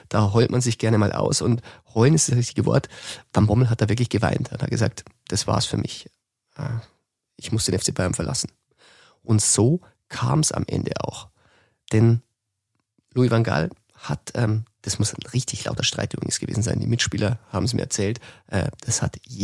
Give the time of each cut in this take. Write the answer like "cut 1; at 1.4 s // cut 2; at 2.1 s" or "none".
none